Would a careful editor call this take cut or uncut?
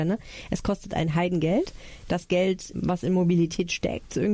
cut